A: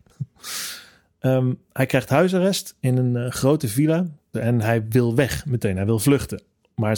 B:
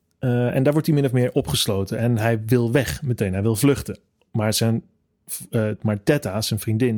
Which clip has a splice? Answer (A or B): A